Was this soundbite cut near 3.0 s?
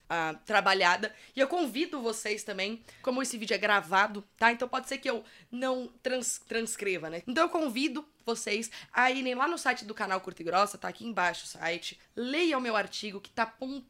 yes; 2 cuts; at 3.0 s, 7.2 s

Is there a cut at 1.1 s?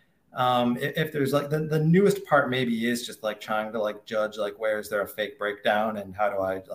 no; 0 cuts

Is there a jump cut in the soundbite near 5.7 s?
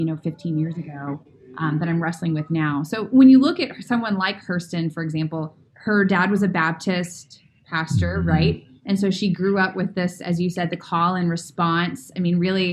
yes; 1 cut; at 5.7 s

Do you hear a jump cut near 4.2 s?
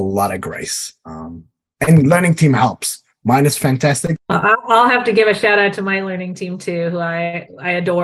yes; 1 cut; at 4.2 s

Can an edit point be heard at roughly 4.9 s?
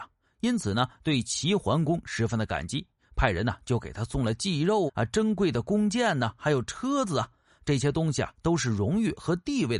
yes; 1 cut; at 4.9 s

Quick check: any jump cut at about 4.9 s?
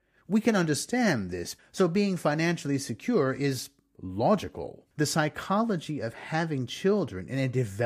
yes; 2 cuts; at 1.6 s, 4.9 s

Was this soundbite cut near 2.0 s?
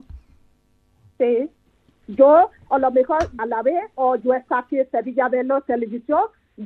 yes; 2 cuts; at 2.0 s, 3.4 s

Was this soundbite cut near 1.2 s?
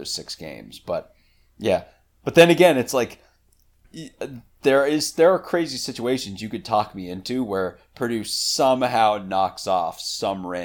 no; 0 cuts

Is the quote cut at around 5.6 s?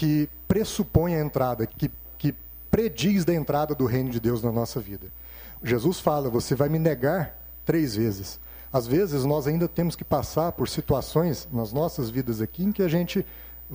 yes; 2 cuts; at 1.7 s, 5.6 s

